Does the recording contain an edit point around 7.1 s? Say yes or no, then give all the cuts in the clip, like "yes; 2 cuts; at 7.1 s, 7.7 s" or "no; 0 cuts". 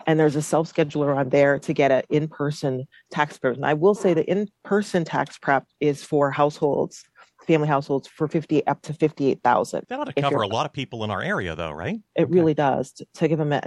no; 1 cut; at 12.1 s